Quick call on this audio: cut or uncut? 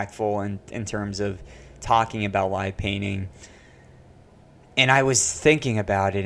uncut